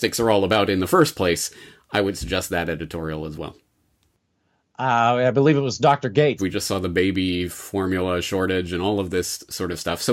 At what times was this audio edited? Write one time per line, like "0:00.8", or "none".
0:06.4